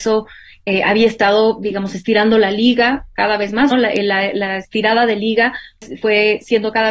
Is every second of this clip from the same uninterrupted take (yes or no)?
no